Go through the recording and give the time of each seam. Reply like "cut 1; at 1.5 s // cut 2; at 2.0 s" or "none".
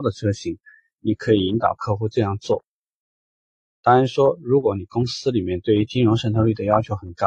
none